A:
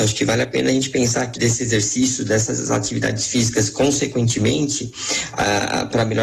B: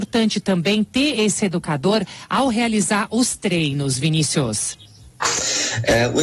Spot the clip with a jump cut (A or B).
A